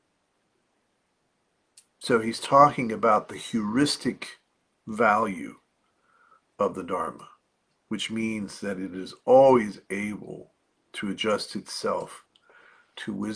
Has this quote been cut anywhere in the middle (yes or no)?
no